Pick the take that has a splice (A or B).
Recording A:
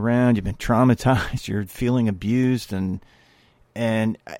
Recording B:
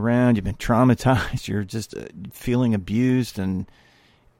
A